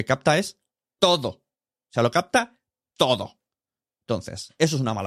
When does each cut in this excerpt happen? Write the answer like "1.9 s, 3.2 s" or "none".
4.0 s